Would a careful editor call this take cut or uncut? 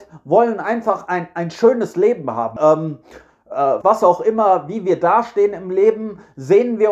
cut